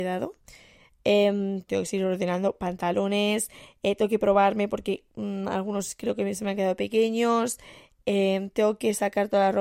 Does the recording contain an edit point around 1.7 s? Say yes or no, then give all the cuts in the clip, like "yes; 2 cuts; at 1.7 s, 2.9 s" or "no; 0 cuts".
yes; 1 cut; at 1.7 s